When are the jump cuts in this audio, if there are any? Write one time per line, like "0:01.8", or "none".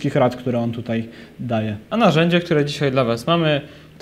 none